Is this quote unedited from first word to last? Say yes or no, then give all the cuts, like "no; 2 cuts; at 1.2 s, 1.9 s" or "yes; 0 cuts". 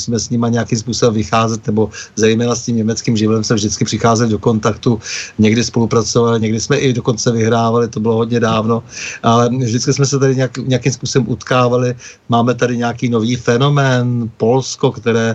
no; 1 cut; at 6.4 s